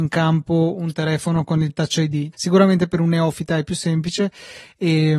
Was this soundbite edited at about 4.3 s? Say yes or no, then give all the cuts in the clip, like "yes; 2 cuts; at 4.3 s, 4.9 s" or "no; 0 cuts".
no; 1 cut; at 2.3 s